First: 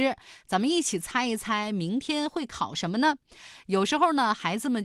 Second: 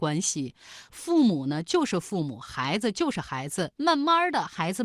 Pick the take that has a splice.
second; 1 cut; at 3.8 s

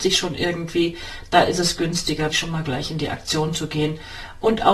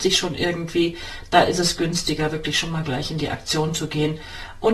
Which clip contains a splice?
first; 1 cut; at 2.3 s

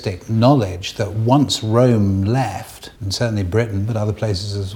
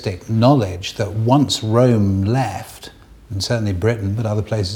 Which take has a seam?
first; 1 cut; at 3.0 s

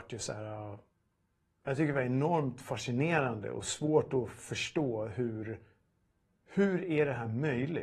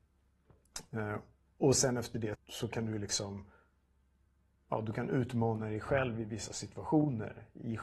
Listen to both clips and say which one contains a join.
second; 1 cut; at 2.3 s

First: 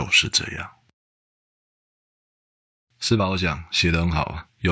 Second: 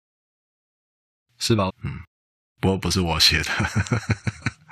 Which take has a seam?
second; 1 cut; at 1.7 s

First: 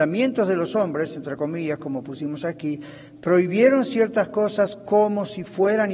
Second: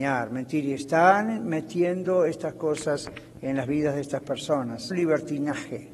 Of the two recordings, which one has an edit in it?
second; 1 cut; at 4.9 s

